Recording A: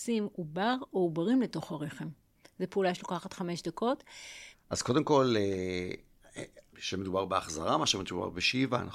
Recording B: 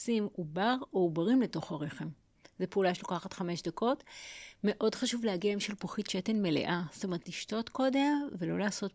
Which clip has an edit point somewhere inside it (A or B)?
A